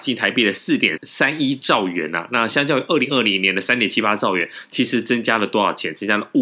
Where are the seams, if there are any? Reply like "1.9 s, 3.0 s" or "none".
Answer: 1.0 s